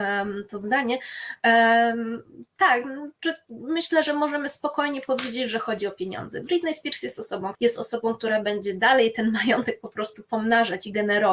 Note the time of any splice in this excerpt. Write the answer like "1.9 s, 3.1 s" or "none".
7.5 s